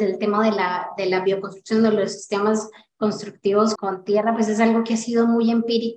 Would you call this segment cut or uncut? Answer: cut